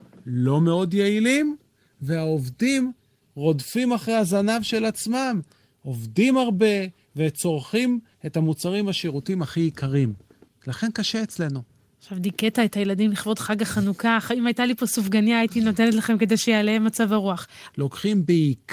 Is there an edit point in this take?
yes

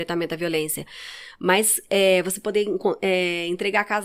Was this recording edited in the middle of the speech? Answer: no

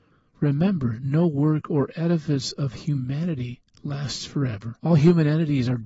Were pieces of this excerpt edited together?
yes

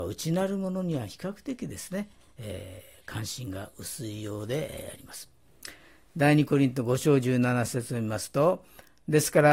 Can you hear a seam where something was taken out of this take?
no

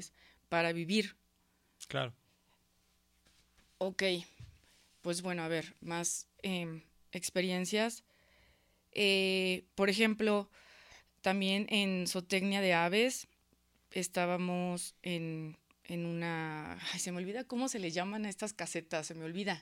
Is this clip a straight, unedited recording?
yes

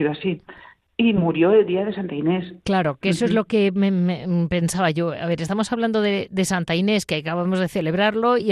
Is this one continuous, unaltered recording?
yes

